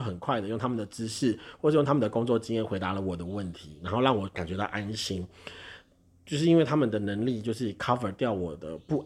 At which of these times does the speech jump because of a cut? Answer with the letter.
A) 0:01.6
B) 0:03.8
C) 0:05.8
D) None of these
D